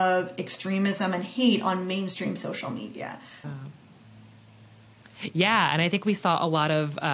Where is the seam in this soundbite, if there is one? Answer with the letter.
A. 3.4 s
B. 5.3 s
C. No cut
A